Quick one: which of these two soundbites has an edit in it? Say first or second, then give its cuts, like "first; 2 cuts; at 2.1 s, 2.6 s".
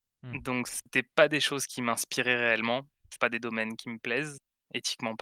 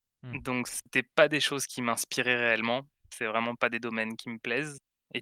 first; 1 cut; at 3.2 s